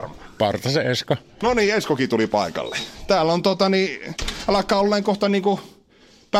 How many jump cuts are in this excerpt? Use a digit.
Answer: 0